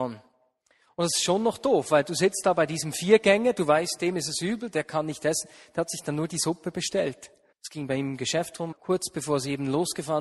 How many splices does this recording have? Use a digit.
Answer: 2